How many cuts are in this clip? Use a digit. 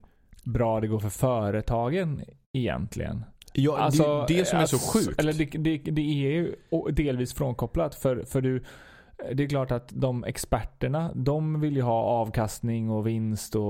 0